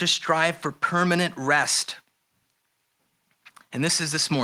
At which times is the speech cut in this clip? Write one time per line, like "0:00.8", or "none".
none